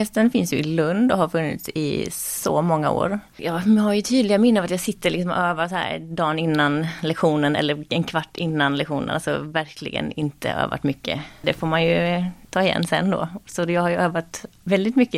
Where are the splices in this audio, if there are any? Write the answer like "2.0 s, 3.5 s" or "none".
3.3 s

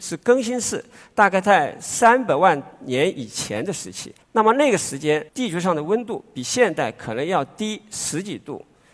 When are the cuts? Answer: 4.2 s, 5.3 s

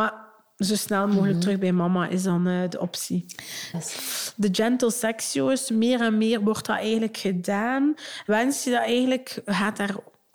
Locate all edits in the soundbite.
3.7 s

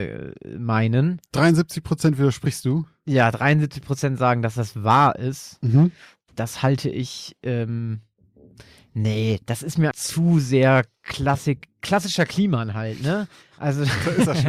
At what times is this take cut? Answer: 9.9 s

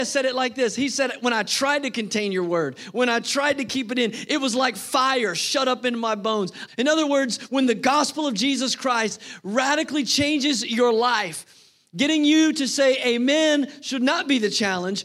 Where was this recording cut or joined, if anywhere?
6.7 s

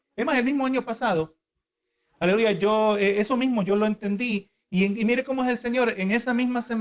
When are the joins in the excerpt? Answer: none

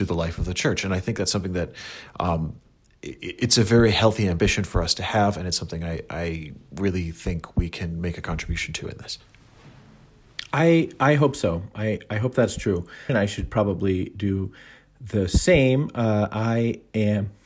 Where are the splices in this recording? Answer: 13.1 s

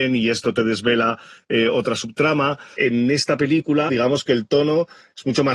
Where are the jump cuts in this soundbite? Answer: 2.8 s, 3.9 s

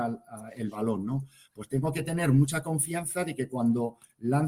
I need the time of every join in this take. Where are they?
none

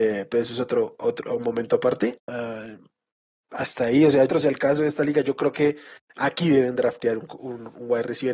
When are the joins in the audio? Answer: 2.2 s, 4.3 s

